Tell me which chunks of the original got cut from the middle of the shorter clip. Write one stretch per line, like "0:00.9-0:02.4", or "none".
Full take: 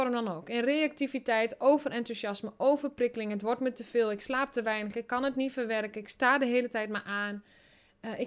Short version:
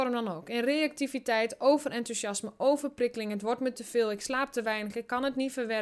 none